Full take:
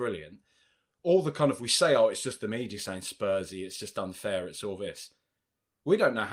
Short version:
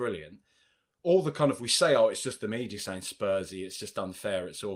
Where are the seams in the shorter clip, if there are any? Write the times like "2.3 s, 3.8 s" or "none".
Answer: none